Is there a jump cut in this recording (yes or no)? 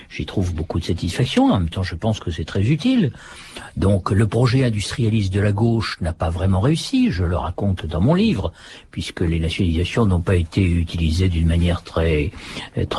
no